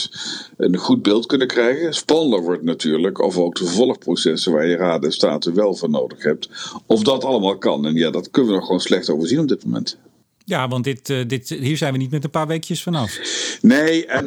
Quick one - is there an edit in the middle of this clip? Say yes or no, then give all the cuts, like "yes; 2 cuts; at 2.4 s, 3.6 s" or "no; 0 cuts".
no; 0 cuts